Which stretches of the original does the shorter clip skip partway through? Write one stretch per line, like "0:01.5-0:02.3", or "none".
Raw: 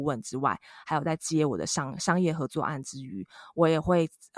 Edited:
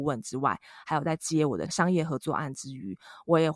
0:01.7-0:02.0

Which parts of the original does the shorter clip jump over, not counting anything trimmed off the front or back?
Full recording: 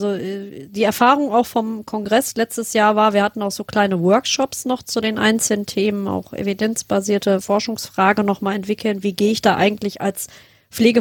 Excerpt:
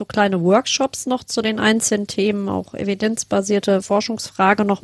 none

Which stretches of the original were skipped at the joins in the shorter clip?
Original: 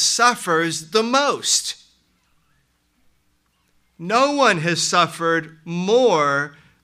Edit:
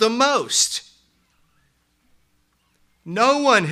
none

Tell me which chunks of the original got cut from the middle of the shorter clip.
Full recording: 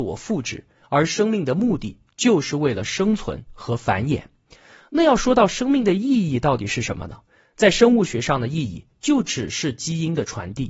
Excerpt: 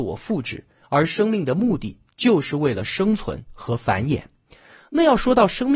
none

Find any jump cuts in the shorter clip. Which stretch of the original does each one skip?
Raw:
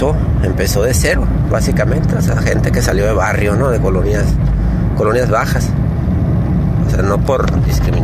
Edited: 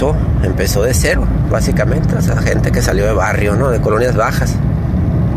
0:03.8-0:04.9

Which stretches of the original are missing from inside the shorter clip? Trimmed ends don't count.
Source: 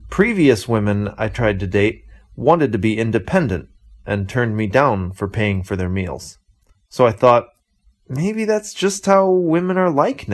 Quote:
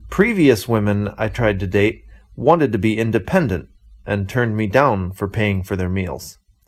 none

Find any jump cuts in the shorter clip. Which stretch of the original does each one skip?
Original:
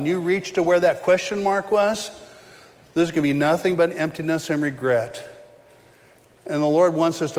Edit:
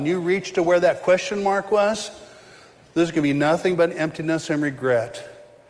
none

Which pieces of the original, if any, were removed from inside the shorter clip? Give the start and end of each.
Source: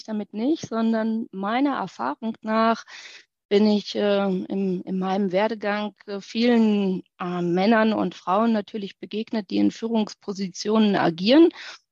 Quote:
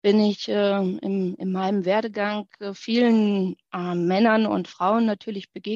none

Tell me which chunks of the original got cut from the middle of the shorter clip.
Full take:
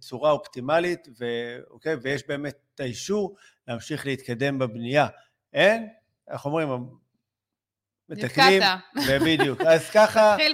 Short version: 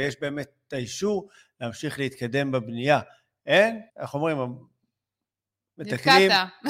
0:06.0-0:06.2

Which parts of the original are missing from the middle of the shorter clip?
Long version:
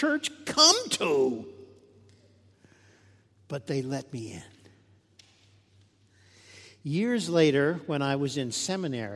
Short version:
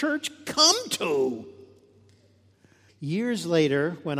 0:02.9-0:06.7

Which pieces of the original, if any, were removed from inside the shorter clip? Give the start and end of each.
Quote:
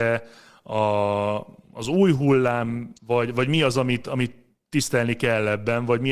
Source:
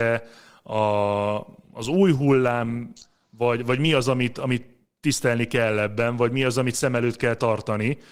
0:03.0-0:03.3

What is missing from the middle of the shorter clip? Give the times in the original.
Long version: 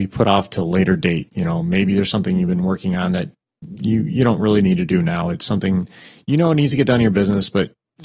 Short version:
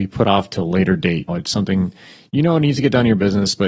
0:01.3-0:05.2

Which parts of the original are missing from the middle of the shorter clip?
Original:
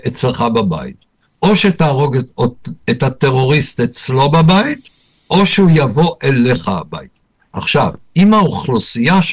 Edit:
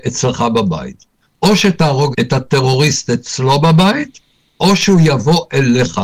0:02.1-0:02.8

